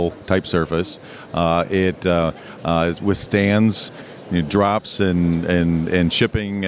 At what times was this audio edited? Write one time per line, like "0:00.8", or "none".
none